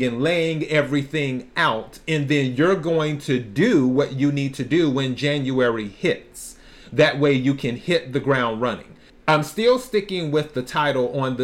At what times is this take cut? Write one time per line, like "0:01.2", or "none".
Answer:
0:09.1